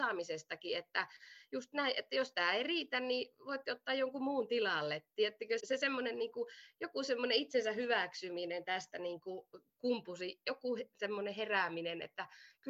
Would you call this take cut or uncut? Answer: cut